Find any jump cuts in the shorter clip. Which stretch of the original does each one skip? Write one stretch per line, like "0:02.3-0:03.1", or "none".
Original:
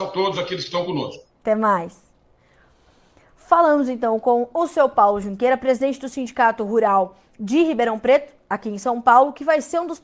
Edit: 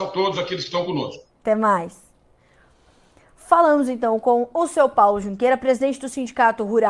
none